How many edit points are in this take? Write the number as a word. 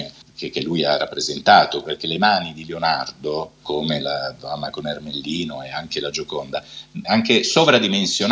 two